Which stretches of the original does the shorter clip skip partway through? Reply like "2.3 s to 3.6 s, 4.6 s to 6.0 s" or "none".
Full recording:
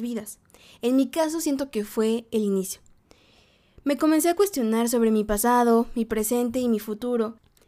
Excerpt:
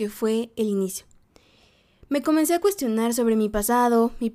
none